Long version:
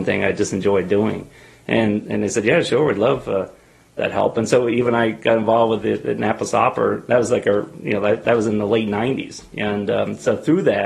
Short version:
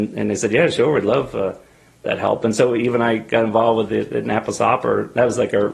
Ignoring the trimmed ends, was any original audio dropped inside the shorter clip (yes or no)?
no